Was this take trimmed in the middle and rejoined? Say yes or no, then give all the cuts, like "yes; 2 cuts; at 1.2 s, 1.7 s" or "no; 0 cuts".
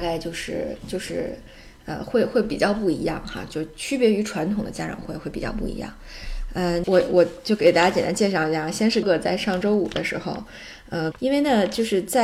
yes; 3 cuts; at 6.8 s, 9.0 s, 11.1 s